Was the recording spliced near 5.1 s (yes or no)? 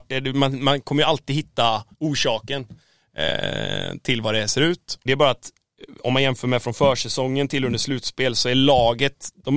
yes